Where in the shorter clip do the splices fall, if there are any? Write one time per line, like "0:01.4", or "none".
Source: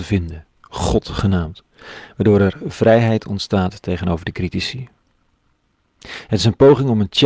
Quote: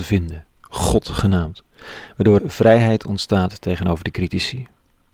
0:02.4